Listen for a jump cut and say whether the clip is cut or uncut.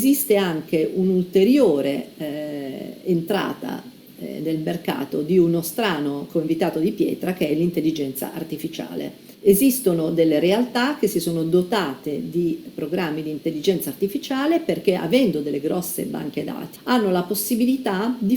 cut